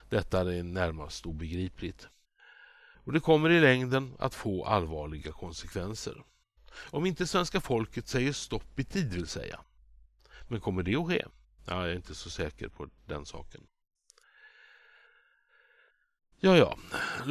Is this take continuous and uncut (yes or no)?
yes